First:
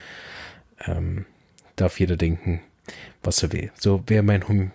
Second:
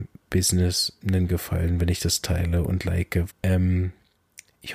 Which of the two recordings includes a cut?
second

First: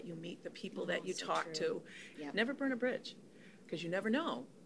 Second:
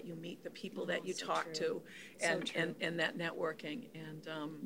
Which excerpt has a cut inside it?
first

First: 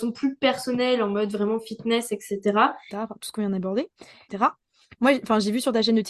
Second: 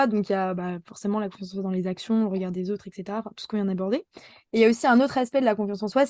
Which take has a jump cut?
first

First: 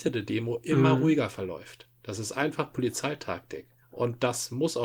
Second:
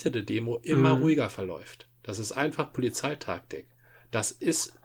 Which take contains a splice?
first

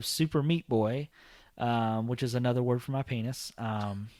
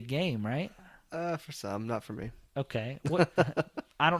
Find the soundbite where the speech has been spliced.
second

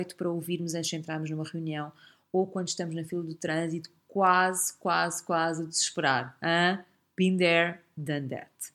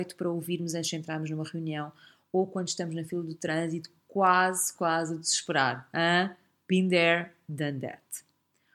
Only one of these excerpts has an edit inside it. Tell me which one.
second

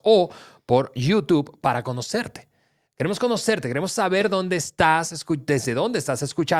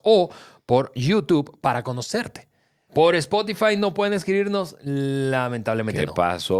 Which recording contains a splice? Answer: second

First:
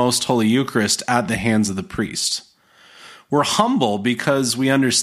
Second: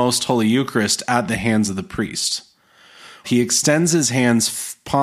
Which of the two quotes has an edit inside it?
second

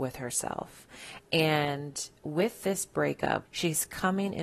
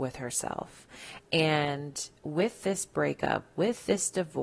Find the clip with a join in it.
first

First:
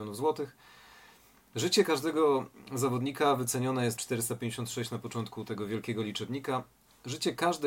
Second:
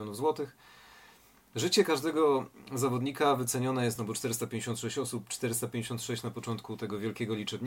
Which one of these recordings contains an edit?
first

